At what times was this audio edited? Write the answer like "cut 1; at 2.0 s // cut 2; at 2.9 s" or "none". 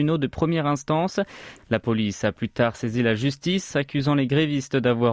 cut 1; at 1.6 s